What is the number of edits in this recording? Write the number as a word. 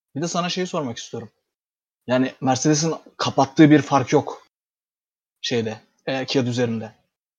two